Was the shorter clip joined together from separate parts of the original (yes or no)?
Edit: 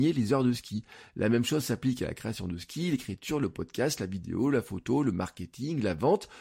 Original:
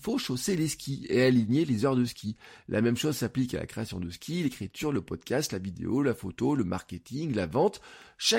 no